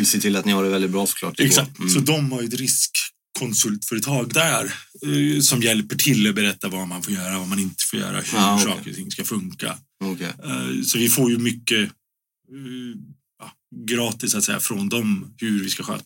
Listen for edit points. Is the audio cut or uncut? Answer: uncut